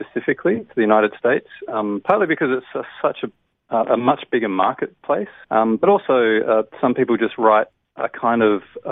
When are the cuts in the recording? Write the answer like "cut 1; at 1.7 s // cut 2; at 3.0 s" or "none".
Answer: cut 1; at 5.4 s